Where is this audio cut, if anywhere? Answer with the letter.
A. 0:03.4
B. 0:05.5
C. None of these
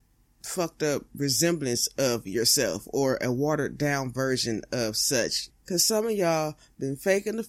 B